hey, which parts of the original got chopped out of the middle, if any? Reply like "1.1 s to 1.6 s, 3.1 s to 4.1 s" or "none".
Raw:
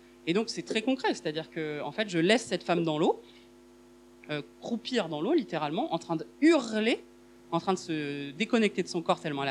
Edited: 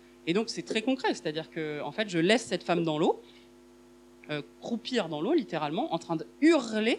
none